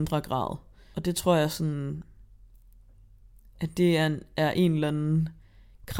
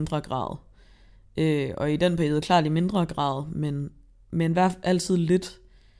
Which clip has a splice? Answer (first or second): first